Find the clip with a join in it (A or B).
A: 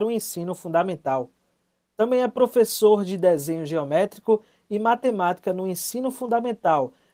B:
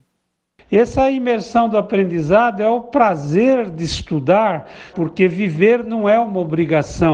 B